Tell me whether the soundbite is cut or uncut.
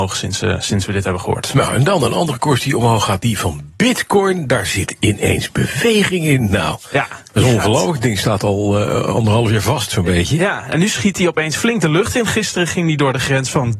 uncut